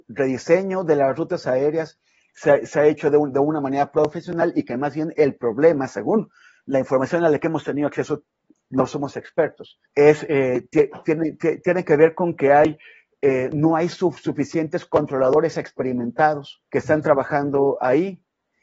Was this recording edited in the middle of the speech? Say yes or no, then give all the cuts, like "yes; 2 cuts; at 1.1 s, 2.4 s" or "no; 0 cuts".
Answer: yes; 2 cuts; at 9.8 s, 16.7 s